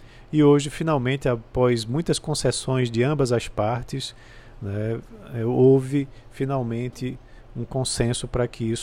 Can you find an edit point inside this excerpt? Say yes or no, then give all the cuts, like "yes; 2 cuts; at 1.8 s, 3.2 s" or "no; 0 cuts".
no; 0 cuts